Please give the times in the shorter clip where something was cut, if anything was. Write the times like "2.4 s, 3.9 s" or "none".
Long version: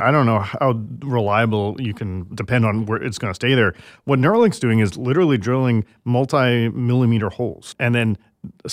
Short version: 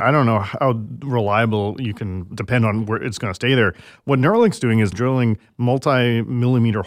4.9 s